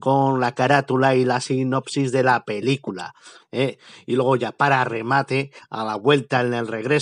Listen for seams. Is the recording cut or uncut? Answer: cut